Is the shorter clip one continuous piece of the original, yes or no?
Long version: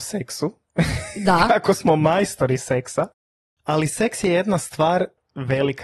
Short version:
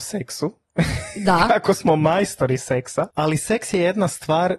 no